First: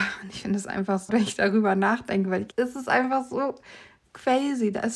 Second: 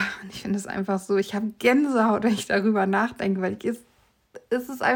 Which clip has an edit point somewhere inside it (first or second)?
first